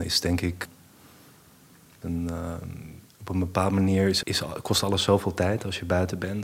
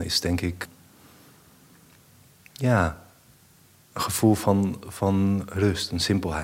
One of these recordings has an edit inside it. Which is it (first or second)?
first